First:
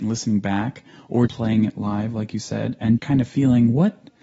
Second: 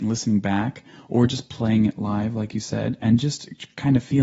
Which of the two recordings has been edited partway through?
first; 2 cuts; at 1.3 s, 3.0 s

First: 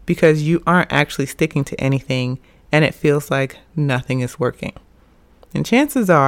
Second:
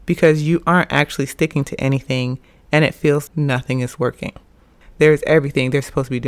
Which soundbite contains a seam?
second; 2 cuts; at 3.3 s, 4.8 s

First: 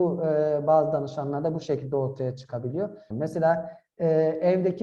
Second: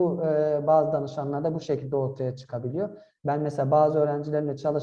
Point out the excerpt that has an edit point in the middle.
first; 1 cut; at 3.1 s

